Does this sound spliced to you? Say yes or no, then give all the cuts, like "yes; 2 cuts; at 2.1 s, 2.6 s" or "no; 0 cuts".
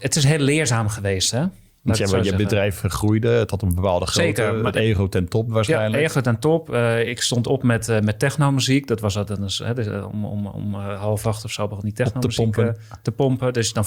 no; 0 cuts